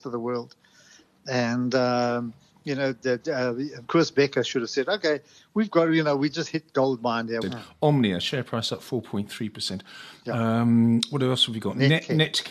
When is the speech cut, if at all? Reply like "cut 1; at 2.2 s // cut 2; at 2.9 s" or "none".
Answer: cut 1; at 3.9 s // cut 2; at 7.4 s

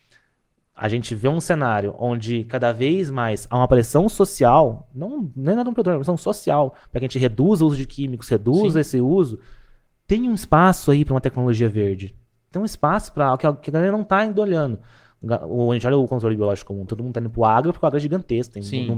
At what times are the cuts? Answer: cut 1; at 16.9 s

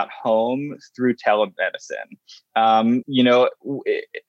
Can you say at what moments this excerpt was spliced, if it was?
cut 1; at 3.0 s

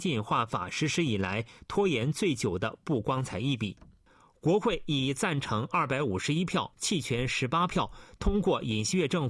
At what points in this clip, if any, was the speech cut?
cut 1; at 6.7 s

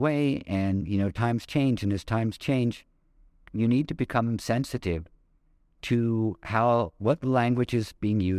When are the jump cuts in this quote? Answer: none

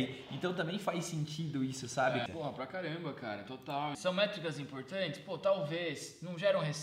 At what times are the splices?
cut 1; at 2.3 s // cut 2; at 3.9 s

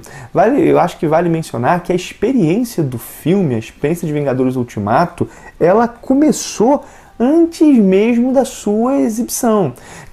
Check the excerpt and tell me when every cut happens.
none

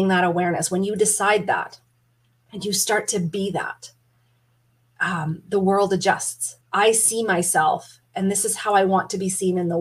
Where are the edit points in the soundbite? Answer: cut 1; at 6.6 s

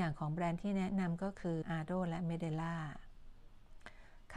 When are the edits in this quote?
cut 1; at 1.6 s

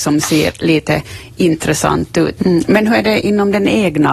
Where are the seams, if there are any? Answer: cut 1; at 2.4 s

